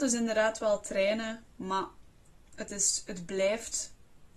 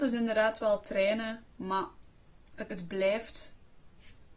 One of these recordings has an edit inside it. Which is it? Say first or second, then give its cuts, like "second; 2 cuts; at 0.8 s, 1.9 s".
second; 1 cut; at 2.7 s